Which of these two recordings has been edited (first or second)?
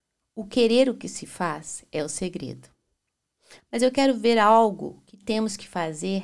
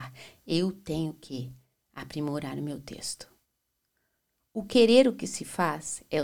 first